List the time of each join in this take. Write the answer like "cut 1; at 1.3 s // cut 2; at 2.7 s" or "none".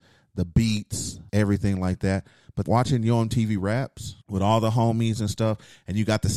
cut 1; at 1.3 s // cut 2; at 2.6 s // cut 3; at 4.2 s